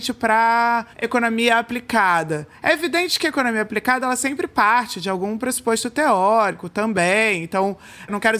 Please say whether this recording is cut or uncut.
cut